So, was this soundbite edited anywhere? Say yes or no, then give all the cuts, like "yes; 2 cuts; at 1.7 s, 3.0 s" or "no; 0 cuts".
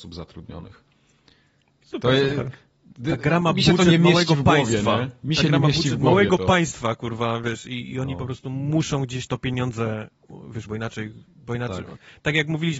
yes; 1 cut; at 10.7 s